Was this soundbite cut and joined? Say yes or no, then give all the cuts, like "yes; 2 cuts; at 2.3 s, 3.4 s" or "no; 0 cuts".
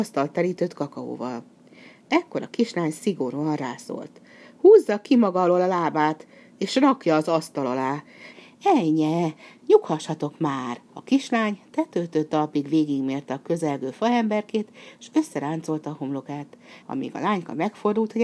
yes; 3 cuts; at 8.3 s, 10.9 s, 16.8 s